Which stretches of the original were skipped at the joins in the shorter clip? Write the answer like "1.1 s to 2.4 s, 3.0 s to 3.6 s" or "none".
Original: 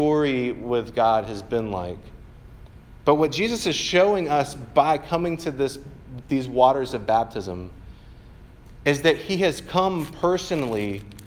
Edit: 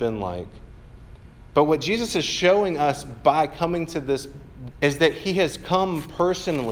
6.2 s to 8.8 s